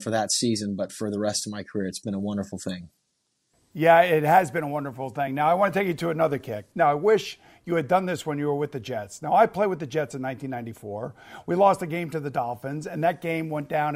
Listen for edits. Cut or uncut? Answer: uncut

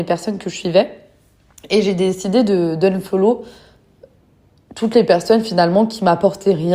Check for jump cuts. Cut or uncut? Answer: uncut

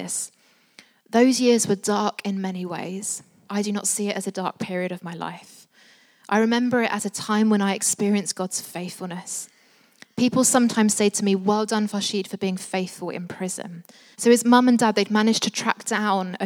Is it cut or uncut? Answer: cut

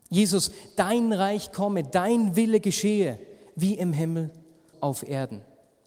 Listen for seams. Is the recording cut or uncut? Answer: cut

